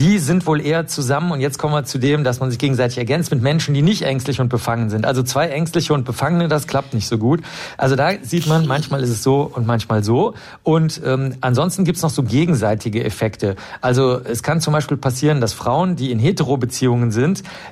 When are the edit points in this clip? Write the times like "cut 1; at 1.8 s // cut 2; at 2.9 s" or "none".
none